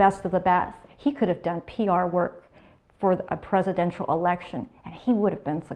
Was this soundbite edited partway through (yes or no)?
no